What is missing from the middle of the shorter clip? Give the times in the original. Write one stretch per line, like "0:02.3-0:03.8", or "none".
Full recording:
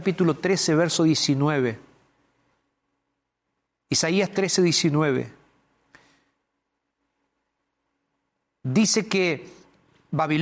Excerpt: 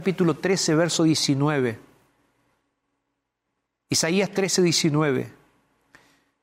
none

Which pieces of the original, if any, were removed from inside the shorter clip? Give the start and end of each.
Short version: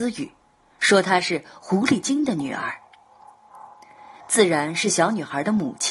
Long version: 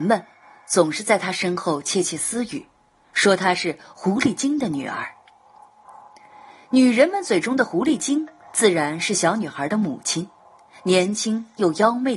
0:06.5-0:08.4

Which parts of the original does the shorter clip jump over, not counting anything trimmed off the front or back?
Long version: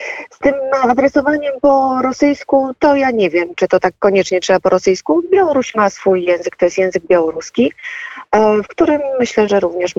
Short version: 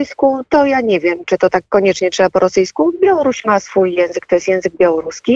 none

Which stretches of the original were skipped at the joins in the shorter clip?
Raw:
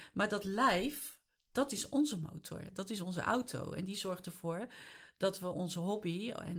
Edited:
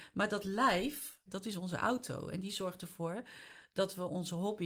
0:01.3-0:02.7

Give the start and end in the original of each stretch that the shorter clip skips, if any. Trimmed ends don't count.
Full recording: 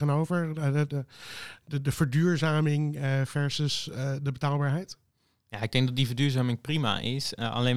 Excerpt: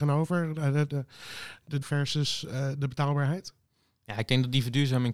0:01.8-0:03.3

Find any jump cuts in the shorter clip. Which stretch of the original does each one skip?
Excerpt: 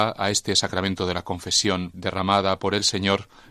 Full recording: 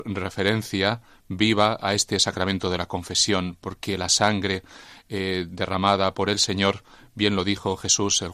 0:03.6-0:05.5

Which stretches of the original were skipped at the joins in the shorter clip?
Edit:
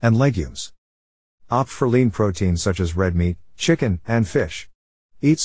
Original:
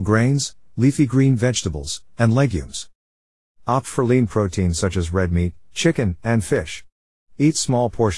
none

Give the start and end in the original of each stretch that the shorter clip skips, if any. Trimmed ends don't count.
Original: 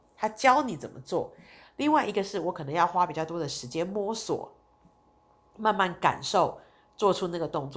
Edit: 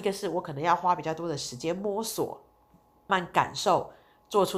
0:05.2-0:05.8

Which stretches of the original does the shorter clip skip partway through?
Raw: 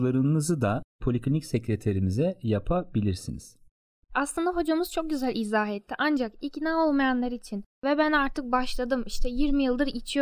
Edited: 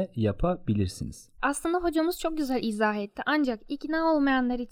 0:03.6-0:04.1

